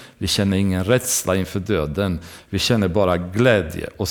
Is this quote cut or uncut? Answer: uncut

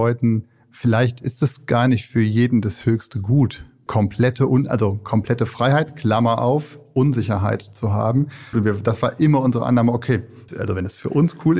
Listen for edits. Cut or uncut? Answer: cut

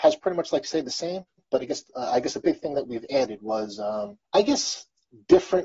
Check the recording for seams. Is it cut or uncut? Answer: cut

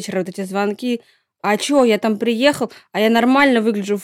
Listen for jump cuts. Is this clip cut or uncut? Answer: uncut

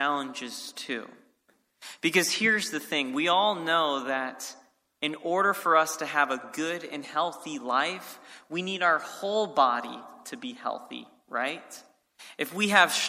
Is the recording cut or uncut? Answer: uncut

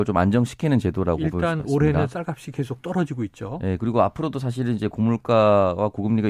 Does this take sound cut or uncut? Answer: uncut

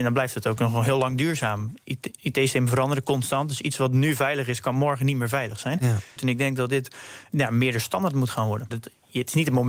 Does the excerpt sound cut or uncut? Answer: cut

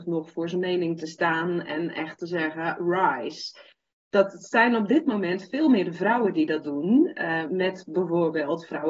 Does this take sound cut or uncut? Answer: cut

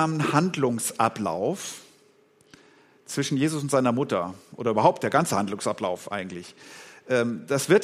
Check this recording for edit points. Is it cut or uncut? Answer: uncut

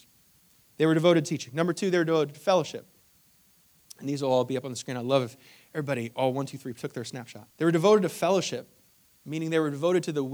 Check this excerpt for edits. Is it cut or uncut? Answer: cut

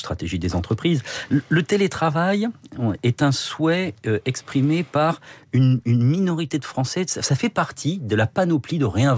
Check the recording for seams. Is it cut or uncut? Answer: uncut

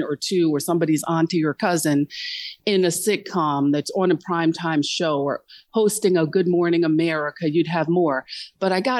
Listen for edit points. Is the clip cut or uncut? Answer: uncut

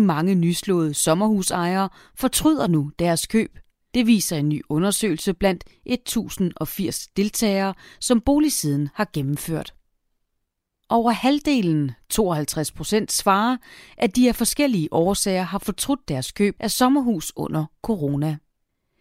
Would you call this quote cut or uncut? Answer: uncut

